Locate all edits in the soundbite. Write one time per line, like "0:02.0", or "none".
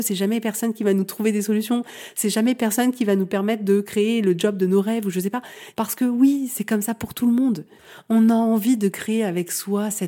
0:05.7

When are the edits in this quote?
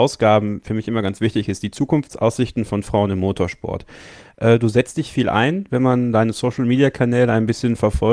none

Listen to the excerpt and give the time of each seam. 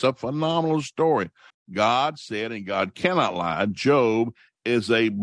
0:01.5

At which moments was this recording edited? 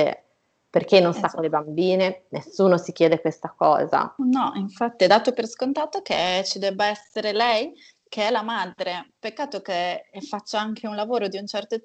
none

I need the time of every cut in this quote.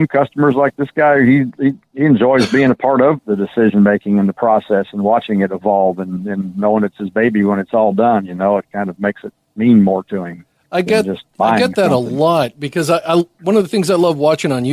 0:03.2

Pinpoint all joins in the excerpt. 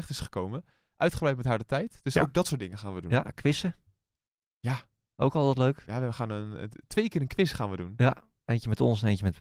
none

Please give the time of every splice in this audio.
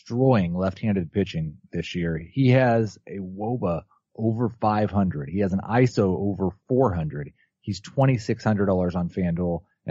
none

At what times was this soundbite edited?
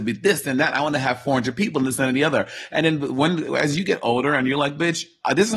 none

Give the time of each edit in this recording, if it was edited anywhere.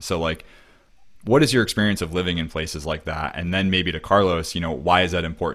none

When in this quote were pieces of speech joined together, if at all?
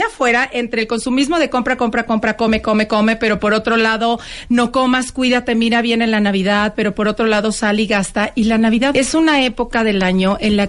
0:02.9
0:08.9

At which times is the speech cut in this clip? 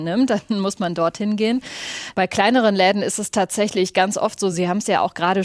none

